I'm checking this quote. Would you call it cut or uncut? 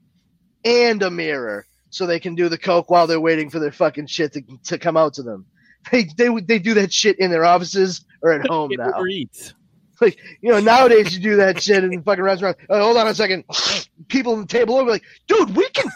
uncut